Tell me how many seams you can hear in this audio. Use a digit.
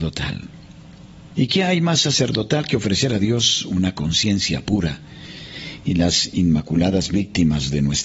1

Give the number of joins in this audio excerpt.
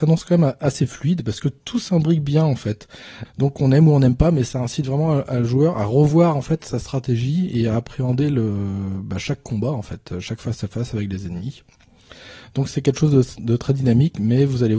1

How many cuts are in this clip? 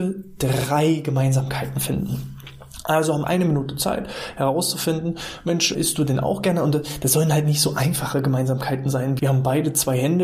3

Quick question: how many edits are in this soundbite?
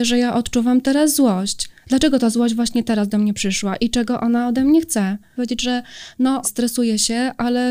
2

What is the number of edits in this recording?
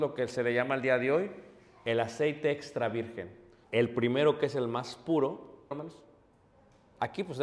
2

